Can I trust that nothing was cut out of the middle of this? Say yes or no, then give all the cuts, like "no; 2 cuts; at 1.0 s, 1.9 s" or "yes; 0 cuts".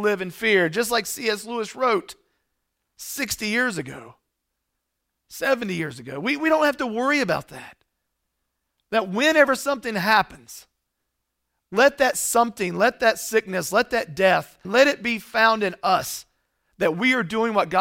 no; 1 cut; at 14.6 s